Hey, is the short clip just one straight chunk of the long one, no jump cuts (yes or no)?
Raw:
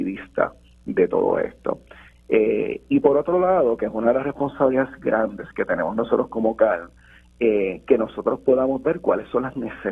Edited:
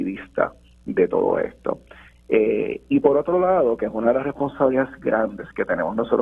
yes